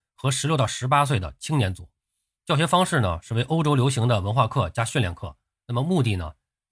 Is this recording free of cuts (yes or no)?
yes